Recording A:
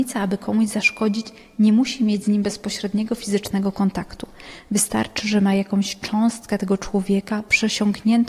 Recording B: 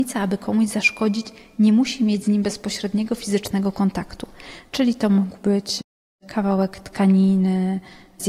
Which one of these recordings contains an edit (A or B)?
B